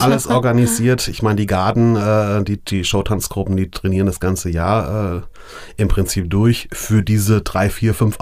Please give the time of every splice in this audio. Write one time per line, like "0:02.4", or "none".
none